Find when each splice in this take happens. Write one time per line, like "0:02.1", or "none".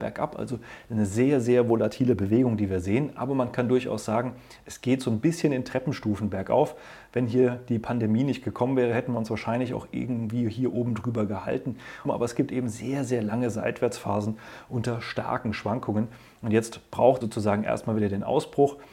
0:12.0
0:17.2

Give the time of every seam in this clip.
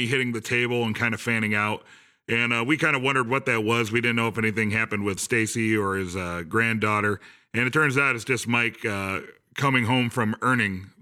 0:05.2

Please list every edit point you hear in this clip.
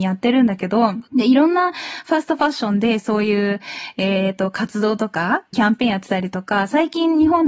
0:01.1
0:05.5

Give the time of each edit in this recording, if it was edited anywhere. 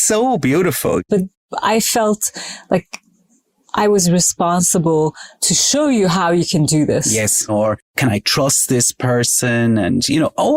0:01.1
0:07.5

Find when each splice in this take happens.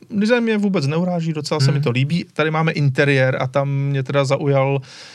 none

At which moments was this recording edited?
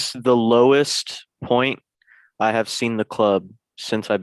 none

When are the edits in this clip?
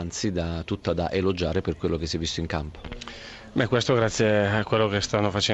none

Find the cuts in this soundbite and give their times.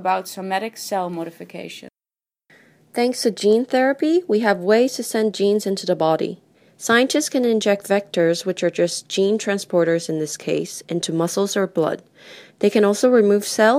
none

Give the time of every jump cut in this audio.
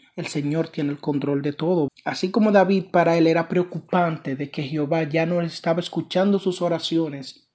0:01.9

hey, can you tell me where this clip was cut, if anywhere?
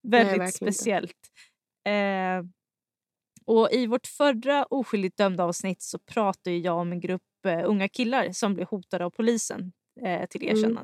none

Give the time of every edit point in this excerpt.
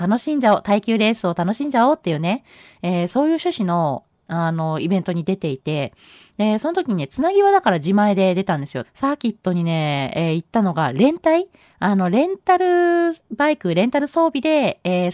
0:08.8

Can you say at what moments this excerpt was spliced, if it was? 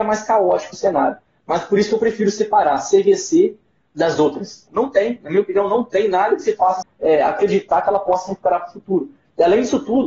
0:04.7
0:06.8

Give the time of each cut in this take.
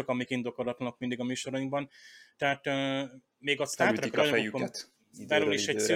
none

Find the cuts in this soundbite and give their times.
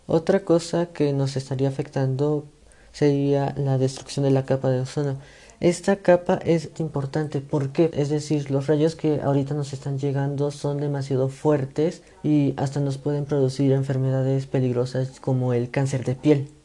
0:06.7
0:07.9
0:12.1

